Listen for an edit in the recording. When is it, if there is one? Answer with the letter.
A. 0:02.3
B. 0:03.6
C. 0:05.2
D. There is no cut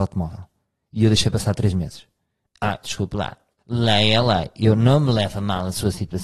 B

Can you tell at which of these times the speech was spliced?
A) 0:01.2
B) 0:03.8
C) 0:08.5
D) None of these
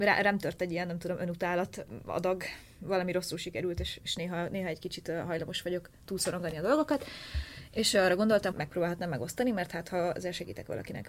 C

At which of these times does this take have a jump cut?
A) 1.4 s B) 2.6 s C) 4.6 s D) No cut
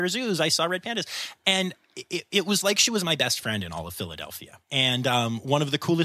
C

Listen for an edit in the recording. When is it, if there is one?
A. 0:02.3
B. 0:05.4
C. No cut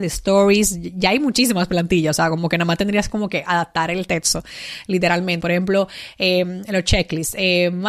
B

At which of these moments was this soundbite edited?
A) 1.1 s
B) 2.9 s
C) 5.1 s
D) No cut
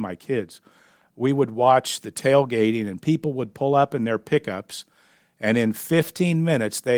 D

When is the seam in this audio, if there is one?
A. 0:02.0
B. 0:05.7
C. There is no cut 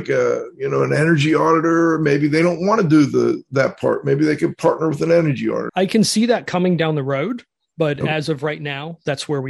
B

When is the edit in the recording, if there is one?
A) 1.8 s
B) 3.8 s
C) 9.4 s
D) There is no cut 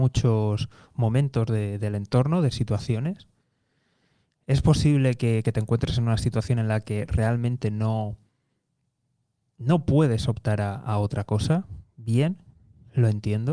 D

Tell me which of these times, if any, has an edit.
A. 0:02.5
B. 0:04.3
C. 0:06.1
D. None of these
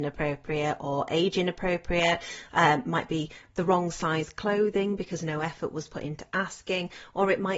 D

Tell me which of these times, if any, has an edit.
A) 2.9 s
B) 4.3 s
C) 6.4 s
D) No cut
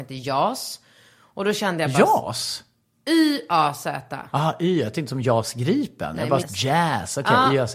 C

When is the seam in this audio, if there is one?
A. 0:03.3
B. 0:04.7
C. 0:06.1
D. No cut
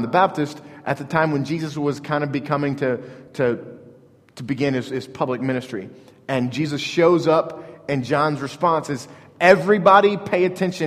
D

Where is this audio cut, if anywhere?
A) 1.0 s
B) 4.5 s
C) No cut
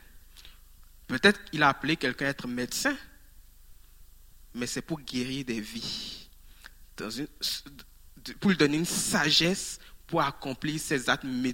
A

